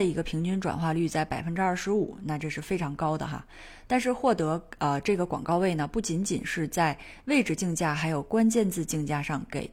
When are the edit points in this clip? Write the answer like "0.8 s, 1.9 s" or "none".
none